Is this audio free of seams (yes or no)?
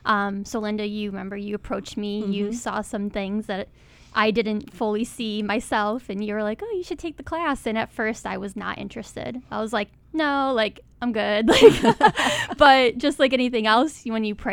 yes